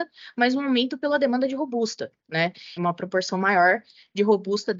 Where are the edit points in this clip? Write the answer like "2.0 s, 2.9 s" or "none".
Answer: 2.8 s